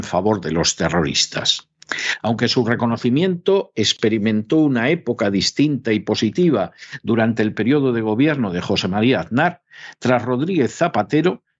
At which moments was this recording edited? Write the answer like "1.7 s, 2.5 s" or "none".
2.2 s